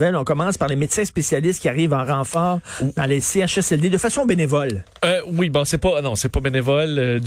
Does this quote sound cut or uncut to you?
uncut